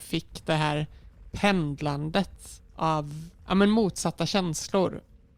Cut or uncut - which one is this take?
uncut